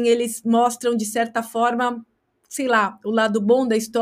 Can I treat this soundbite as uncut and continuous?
yes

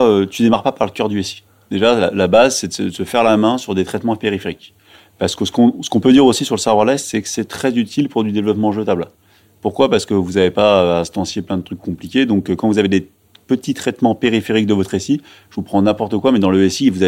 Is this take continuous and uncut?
yes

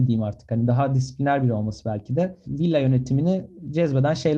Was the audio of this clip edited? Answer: no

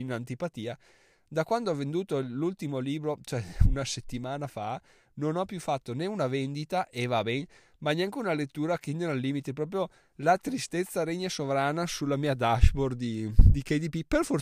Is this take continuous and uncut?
yes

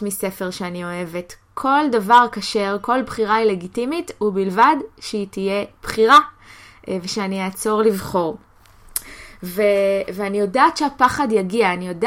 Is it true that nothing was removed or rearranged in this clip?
yes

